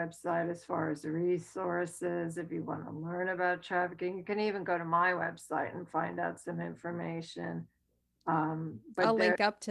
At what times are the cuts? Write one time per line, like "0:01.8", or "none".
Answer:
none